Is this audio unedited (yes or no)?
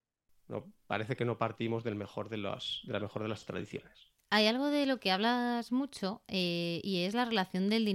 no